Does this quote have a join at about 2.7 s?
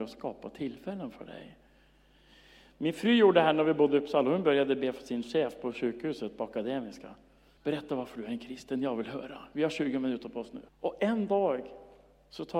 no; 2 cuts; at 7.6 s, 10.7 s

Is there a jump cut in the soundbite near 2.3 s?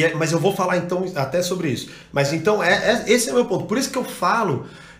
no; 0 cuts

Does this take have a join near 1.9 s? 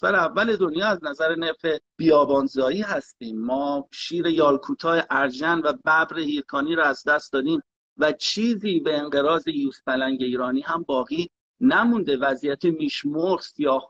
yes; 1 cut; at 1.9 s

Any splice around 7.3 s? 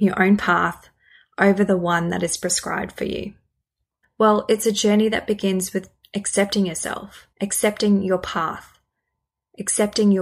yes; 2 cuts; at 4.0 s, 7.3 s

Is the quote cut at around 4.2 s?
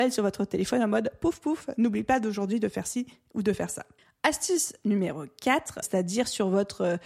yes; 2 cuts; at 4.2 s, 5.8 s

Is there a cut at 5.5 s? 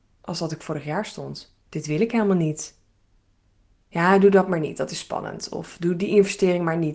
no; 2 cuts; at 1.6 s, 3.8 s

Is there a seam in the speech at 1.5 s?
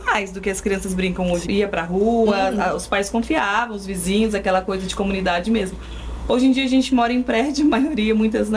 yes; 1 cut; at 1.5 s

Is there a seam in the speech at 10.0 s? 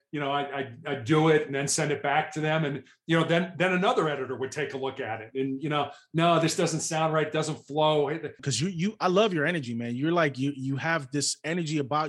no; 1 cut; at 8.4 s

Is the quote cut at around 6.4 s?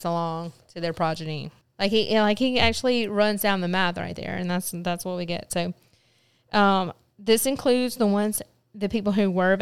no; 1 cut; at 1.6 s

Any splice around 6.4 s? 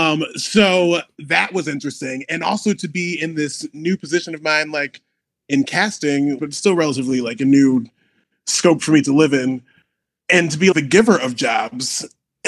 yes; 2 cuts; at 6.4 s, 10.7 s

